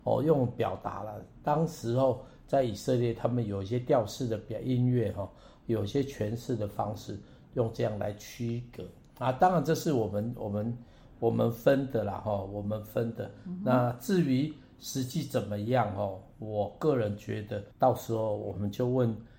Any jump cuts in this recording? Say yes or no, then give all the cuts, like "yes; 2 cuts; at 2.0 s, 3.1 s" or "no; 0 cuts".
yes; 1 cut; at 17.7 s